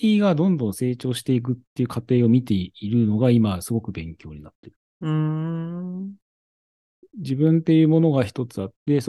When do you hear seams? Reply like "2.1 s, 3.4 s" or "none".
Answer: none